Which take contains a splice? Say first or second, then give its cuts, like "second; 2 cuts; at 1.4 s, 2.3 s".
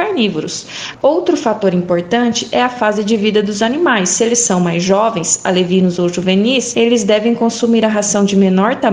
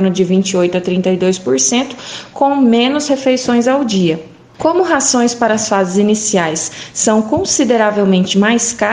first; 1 cut; at 0.9 s